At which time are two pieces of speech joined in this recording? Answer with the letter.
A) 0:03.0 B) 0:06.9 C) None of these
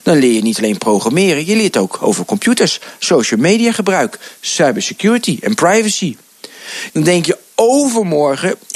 B